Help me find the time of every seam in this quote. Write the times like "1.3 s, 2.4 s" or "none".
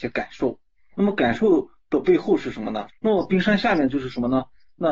0.9 s, 2.9 s